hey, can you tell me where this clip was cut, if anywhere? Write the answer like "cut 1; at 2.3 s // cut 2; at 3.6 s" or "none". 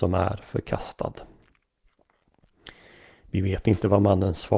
none